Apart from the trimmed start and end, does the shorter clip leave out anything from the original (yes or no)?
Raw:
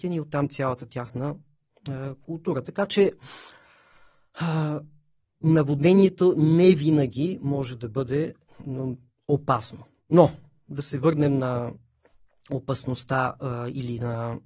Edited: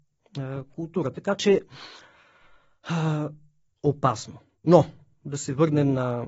yes